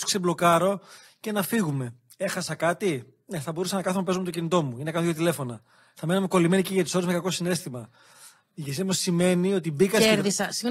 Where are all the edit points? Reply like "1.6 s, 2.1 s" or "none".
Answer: none